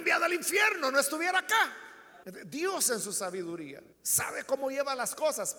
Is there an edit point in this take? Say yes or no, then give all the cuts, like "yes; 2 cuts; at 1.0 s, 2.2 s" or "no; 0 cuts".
yes; 2 cuts; at 2.2 s, 3.9 s